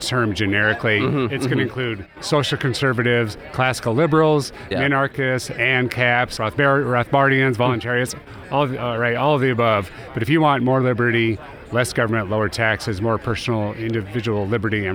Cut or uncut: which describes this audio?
cut